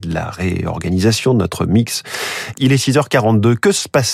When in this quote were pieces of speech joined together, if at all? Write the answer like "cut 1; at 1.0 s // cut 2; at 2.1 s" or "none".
cut 1; at 2.5 s